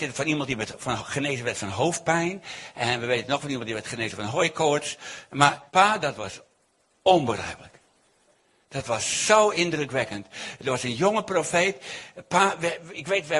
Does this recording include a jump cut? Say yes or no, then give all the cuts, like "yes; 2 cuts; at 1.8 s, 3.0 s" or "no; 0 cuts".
yes; 1 cut; at 5.7 s